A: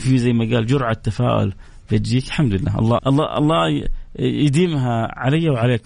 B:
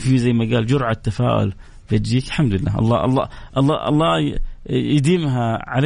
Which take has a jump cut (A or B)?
A